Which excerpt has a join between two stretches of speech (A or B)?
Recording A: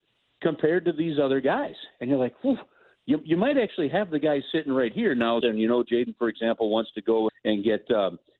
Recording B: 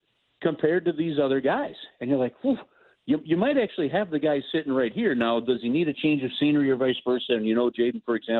A